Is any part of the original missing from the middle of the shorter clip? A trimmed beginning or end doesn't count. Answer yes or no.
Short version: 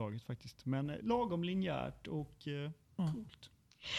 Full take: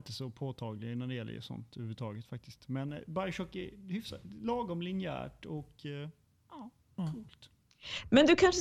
yes